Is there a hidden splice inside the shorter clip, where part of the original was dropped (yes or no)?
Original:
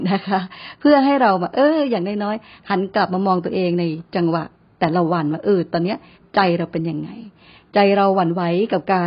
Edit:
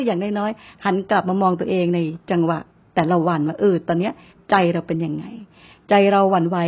no